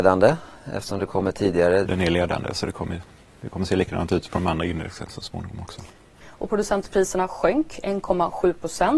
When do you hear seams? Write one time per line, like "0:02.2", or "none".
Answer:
0:01.8
0:06.2